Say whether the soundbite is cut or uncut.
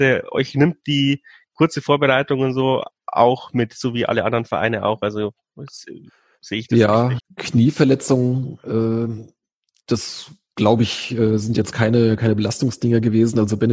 cut